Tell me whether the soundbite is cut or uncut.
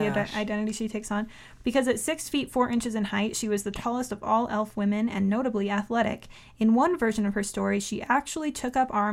uncut